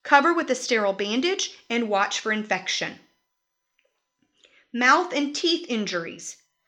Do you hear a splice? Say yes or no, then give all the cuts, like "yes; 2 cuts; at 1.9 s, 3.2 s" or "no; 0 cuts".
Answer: no; 0 cuts